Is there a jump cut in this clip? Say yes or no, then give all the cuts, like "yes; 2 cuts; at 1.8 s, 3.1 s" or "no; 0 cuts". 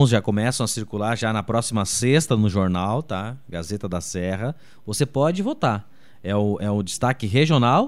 no; 0 cuts